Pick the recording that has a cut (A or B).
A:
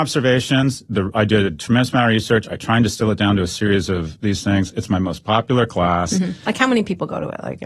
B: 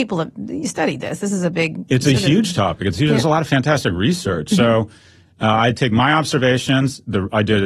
A